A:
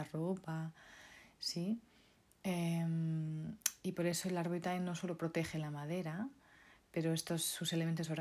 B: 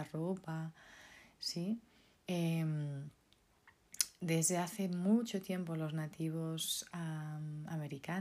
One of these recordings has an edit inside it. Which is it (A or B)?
B